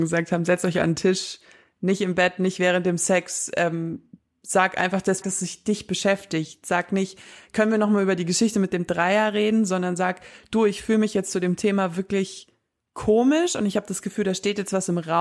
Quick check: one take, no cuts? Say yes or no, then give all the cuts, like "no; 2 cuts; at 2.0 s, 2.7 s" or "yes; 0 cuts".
no; 1 cut; at 5.2 s